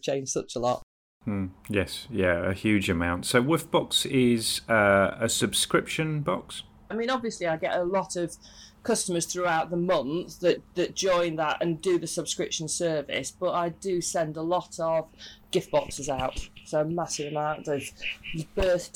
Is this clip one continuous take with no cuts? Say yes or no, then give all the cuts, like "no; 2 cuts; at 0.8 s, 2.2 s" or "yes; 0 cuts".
no; 1 cut; at 6.9 s